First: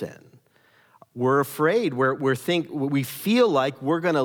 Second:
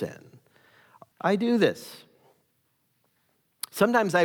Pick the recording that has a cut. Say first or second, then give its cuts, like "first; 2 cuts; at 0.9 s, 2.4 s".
second; 1 cut; at 1.1 s